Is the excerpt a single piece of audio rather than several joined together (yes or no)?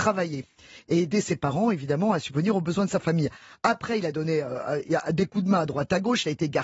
yes